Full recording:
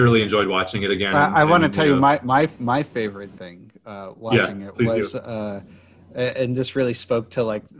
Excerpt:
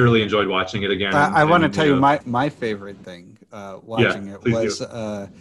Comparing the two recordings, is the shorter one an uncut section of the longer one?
no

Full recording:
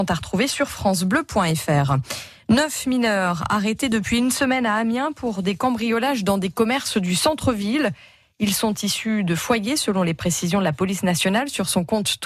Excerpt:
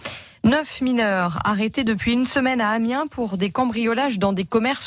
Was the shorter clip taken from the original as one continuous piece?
yes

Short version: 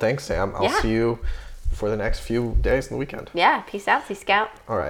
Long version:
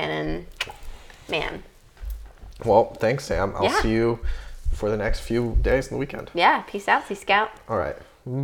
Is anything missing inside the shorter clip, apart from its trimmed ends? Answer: no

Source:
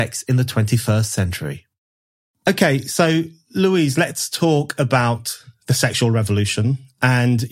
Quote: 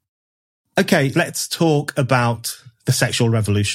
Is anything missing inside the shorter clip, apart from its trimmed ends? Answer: yes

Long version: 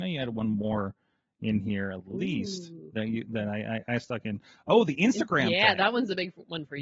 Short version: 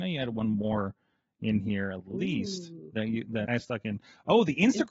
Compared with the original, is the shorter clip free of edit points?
no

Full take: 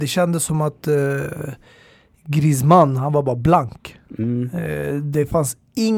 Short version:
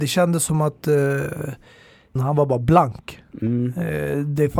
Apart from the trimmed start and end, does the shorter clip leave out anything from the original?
yes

